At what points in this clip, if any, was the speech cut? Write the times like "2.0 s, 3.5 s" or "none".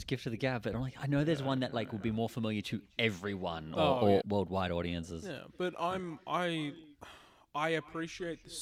4.2 s